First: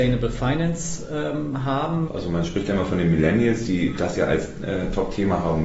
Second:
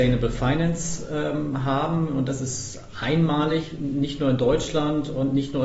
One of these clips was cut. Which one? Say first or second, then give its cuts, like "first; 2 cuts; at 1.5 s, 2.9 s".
first; 1 cut; at 2.1 s